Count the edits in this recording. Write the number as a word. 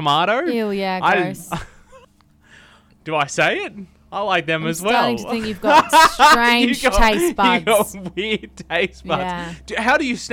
one